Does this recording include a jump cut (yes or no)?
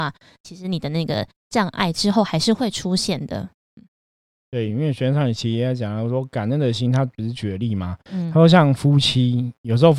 no